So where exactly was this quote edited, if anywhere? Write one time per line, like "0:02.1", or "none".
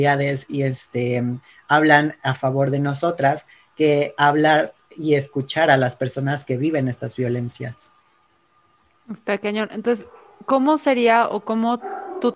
none